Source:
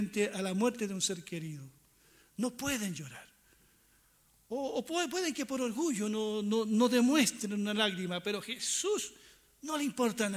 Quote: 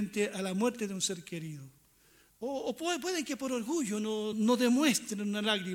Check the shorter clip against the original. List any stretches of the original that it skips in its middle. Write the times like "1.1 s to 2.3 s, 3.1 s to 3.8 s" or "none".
2.3 s to 4.4 s, 6.4 s to 6.6 s